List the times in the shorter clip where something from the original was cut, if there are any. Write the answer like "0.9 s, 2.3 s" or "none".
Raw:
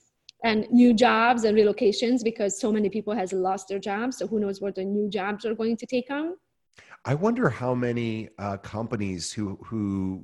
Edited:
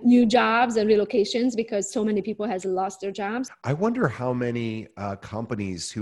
3.5 s